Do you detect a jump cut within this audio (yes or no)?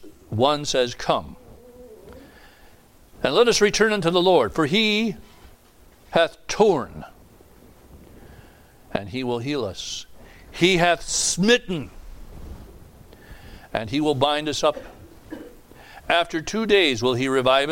no